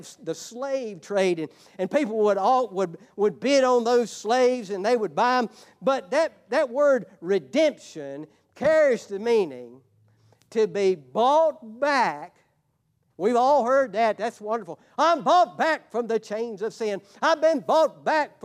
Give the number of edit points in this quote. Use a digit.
1